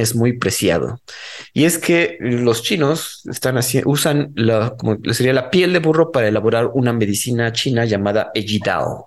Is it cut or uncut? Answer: cut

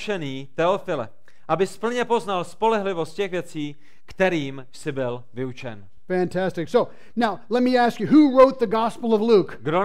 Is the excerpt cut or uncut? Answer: uncut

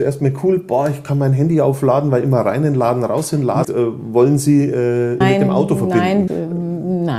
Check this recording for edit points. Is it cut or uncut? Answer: cut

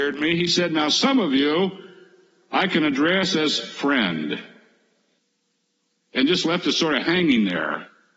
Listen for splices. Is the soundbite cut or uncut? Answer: uncut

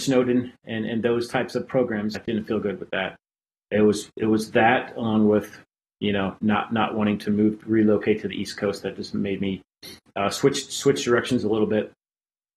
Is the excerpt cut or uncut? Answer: cut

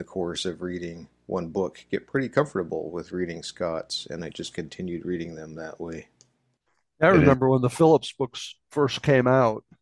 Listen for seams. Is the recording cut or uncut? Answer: uncut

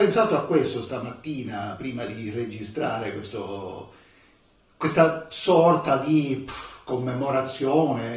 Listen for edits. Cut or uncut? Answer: uncut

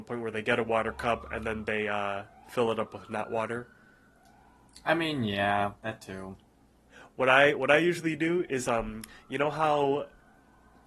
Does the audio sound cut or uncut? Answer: uncut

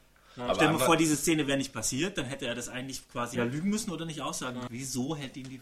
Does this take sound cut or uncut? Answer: cut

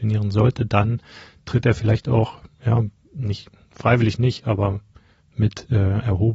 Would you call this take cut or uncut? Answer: uncut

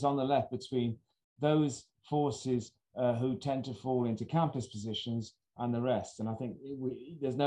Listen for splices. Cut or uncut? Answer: uncut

